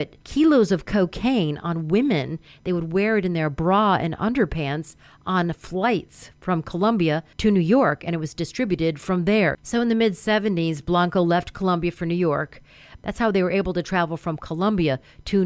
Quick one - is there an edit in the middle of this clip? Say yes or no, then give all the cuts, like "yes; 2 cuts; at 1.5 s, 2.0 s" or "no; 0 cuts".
yes; 2 cuts; at 9.5 s, 13.0 s